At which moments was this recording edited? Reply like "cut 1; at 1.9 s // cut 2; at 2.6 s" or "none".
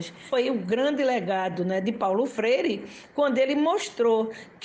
none